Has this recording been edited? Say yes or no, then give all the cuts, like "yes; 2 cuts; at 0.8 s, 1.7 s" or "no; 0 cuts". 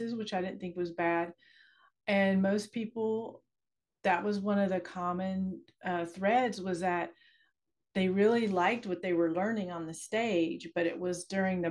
no; 0 cuts